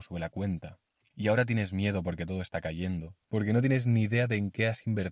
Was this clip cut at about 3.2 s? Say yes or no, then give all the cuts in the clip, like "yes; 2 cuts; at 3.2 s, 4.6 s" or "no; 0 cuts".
yes; 1 cut; at 3.2 s